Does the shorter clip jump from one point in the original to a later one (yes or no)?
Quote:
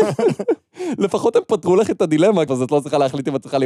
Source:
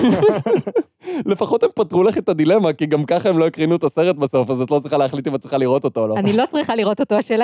yes